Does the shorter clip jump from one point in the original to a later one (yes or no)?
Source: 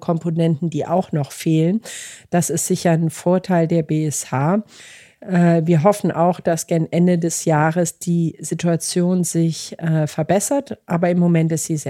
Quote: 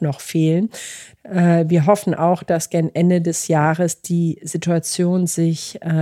yes